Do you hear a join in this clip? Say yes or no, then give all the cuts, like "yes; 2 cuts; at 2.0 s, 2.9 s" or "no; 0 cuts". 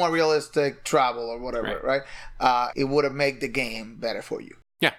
yes; 1 cut; at 2.7 s